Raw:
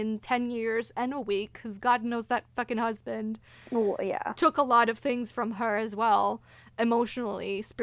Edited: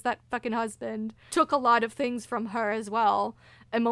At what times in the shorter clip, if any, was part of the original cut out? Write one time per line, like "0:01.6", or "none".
0:01.3